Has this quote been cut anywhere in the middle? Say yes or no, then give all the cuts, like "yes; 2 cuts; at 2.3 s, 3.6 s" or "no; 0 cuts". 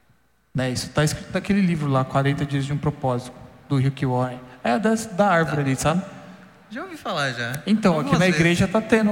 no; 0 cuts